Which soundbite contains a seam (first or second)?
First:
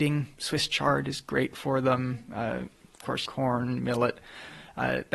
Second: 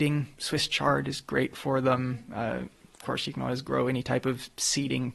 first